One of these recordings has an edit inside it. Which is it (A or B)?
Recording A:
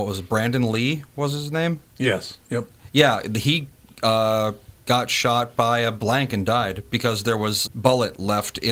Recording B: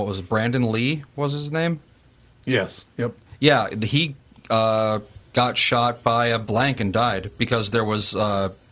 A